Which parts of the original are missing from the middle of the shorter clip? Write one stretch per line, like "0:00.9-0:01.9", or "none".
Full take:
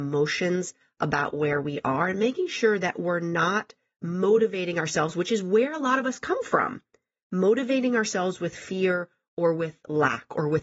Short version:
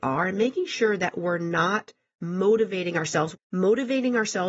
0:05.1-0:07.1